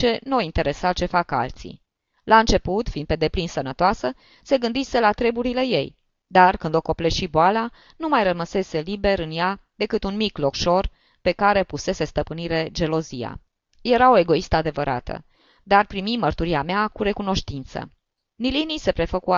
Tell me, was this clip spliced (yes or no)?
no